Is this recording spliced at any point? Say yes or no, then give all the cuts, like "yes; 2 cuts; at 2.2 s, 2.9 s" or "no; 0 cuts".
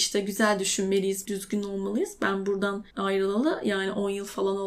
yes; 2 cuts; at 1.2 s, 2.9 s